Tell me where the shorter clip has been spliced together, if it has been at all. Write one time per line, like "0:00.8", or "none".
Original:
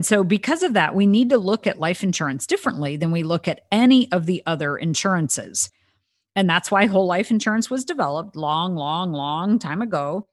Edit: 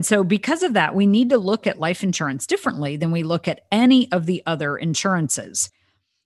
none